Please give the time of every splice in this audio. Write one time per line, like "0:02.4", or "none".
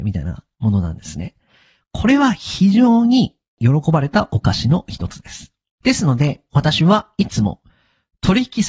none